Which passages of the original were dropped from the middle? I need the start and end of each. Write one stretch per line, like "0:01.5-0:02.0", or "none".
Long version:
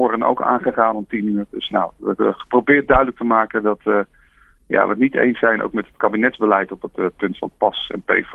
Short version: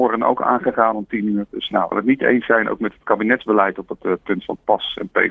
0:01.9-0:04.8